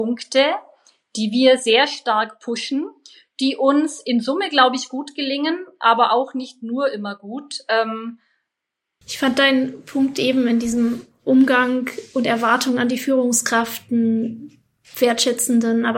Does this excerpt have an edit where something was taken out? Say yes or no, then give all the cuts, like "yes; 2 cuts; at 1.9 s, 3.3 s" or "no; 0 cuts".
yes; 1 cut; at 9.0 s